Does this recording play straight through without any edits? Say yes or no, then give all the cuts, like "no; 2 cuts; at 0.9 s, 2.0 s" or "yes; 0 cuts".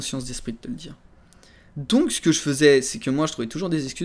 yes; 0 cuts